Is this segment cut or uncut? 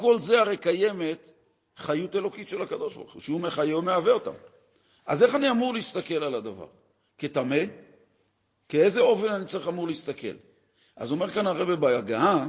uncut